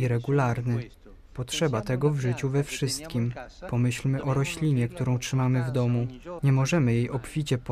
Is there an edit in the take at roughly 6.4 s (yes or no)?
yes